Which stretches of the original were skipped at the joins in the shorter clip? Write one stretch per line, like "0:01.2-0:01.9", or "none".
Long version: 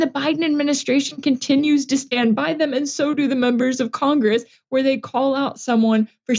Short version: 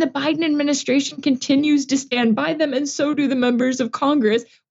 none